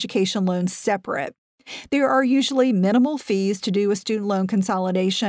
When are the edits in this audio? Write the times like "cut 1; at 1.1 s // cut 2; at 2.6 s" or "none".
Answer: none